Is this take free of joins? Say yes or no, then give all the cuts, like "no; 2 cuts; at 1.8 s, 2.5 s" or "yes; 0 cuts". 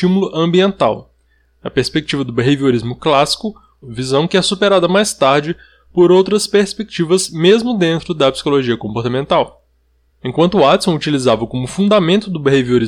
no; 2 cuts; at 3.8 s, 10.1 s